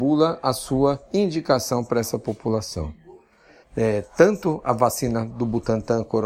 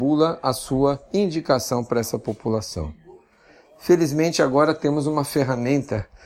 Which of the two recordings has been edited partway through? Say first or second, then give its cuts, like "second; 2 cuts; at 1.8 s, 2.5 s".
first; 1 cut; at 3.6 s